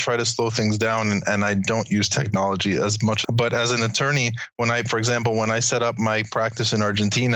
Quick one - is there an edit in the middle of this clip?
no; 0 cuts

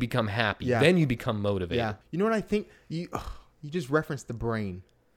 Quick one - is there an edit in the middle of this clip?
yes; 1 cut; at 2.0 s

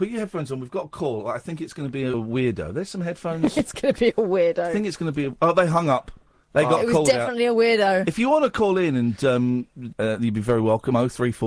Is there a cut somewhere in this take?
yes; 2 cuts; at 2.1 s, 9.9 s

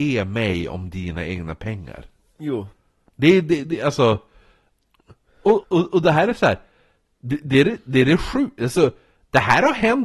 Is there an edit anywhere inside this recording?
yes; 1 cut; at 5.6 s

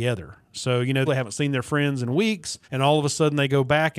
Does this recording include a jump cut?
yes; 2 cuts; at 1.1 s, 2.6 s

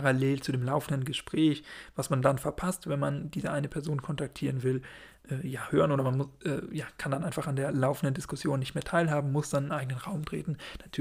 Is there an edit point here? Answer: no; 0 cuts

